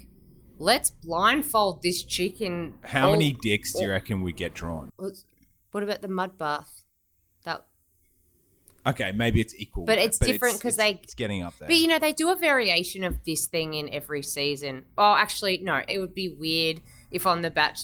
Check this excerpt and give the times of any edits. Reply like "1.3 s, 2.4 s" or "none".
4.9 s, 15.9 s